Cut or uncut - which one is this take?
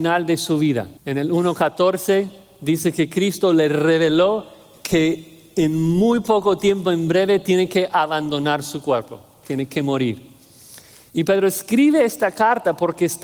cut